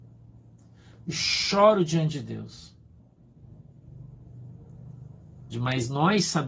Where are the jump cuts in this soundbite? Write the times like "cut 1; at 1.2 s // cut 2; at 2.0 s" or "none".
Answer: cut 1; at 5.5 s